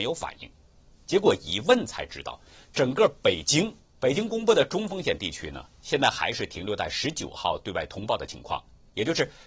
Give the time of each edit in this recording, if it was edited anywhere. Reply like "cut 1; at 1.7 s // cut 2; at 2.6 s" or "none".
cut 1; at 3.9 s